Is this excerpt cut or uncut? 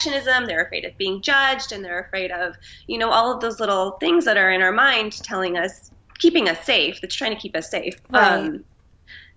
uncut